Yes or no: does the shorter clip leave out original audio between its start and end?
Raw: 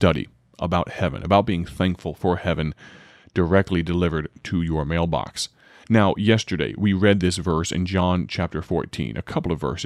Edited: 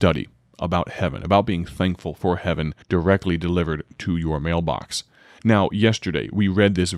yes